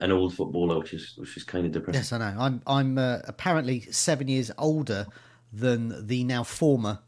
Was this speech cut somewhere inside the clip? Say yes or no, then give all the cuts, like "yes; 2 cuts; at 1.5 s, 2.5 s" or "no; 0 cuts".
no; 0 cuts